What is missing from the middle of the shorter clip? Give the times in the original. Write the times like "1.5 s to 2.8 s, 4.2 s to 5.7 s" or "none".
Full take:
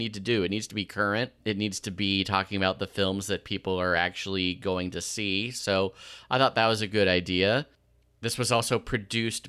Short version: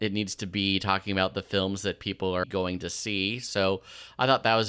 3.9 s to 4.5 s